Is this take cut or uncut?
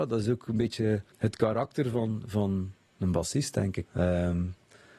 cut